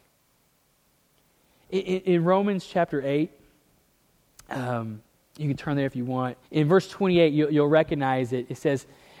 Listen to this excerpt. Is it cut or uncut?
cut